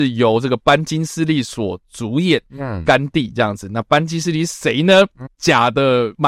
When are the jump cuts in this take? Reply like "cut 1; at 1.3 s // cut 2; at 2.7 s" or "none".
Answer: cut 1; at 5.3 s